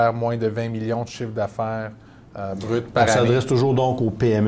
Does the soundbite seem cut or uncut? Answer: uncut